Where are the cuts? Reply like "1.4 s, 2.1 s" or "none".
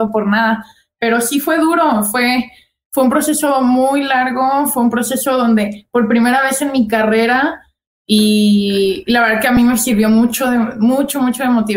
7.9 s